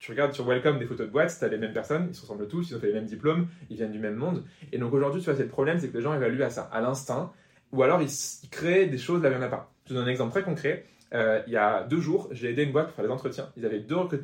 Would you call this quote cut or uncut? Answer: uncut